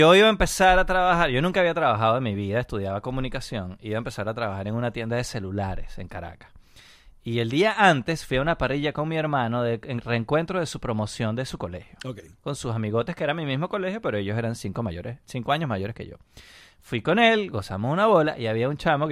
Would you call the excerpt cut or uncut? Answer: uncut